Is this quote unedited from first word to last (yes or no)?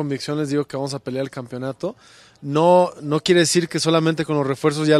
yes